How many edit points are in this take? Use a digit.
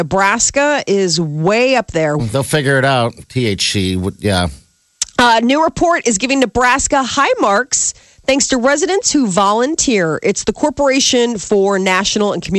1